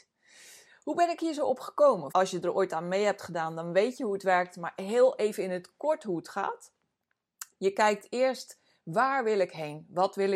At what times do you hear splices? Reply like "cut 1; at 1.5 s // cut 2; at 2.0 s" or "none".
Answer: cut 1; at 2.1 s